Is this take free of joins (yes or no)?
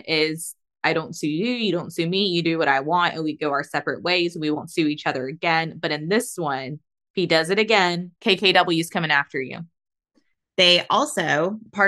no